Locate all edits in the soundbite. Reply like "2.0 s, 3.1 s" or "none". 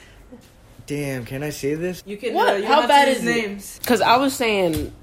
2.0 s, 3.8 s